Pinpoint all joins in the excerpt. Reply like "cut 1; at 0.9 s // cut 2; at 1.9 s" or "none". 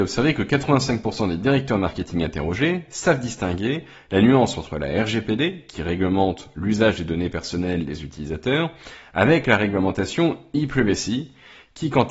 none